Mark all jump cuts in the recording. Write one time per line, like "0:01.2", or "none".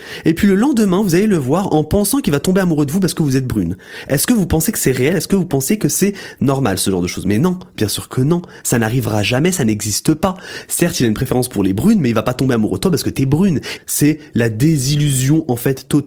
0:13.8

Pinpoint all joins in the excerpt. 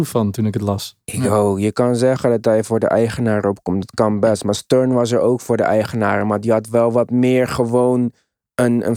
none

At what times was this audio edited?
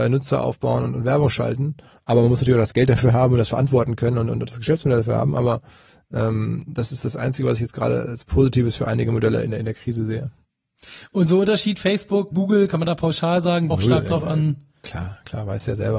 0:12.3
0:13.7

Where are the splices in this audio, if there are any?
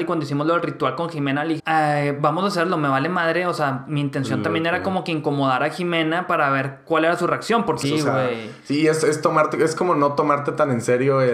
0:01.6
0:07.8

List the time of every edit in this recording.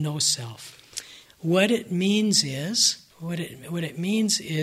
0:01.3
0:03.1

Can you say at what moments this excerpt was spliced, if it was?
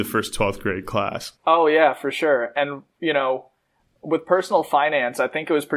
0:01.4

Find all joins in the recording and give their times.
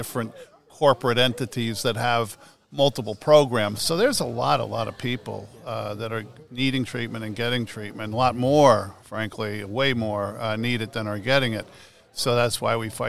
0:03.8

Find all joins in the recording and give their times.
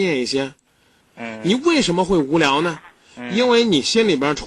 0:01.0

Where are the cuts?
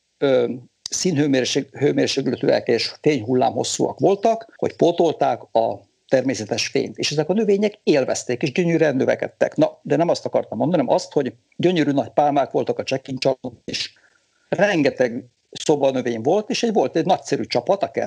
0:02.6

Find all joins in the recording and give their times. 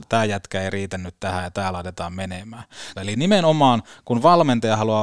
0:02.9

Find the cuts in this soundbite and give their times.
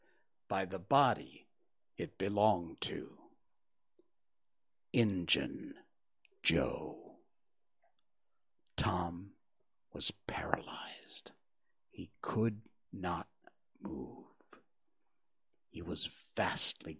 none

